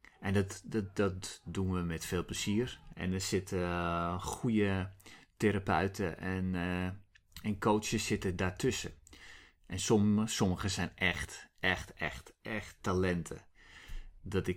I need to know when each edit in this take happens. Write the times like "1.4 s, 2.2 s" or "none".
2.9 s